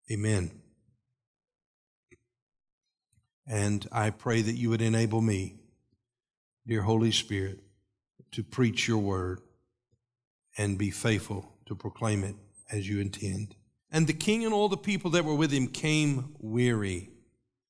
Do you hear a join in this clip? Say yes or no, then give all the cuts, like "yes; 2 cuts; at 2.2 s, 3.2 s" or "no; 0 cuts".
yes; 2 cuts; at 3.3 s, 13.8 s